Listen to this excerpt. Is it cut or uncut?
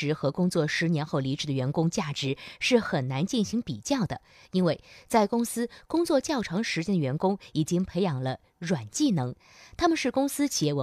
uncut